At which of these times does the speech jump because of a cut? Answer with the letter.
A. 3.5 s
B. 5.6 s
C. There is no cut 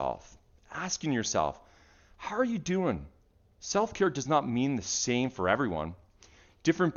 A